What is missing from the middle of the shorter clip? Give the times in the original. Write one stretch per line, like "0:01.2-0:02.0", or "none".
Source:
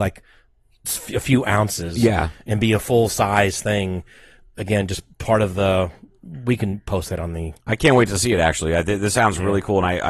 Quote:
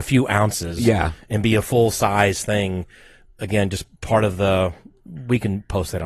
none

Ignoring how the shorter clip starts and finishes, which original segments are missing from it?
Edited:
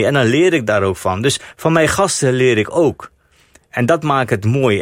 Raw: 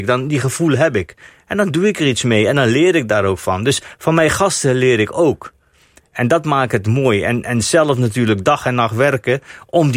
none

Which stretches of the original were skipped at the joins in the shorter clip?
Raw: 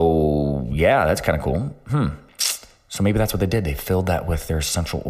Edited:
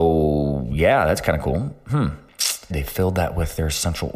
0:02.7-0:03.6

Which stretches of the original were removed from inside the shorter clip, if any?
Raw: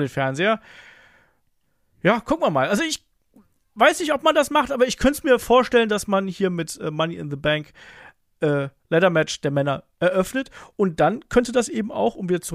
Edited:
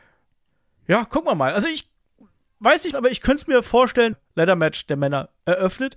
0:04.1-0:04.7
0:05.9-0:08.7

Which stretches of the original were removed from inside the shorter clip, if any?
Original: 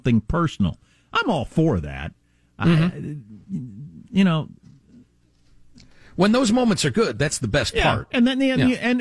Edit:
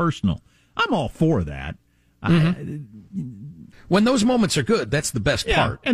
0:04.1-0:06.0

